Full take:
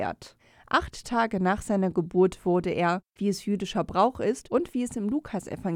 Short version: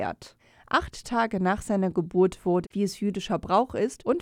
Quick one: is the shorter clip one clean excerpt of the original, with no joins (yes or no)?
no